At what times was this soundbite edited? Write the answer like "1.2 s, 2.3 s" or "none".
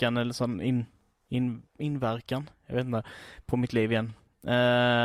none